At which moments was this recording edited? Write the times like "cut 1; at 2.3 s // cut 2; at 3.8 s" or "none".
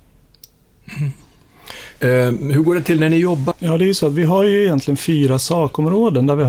cut 1; at 2.0 s // cut 2; at 3.5 s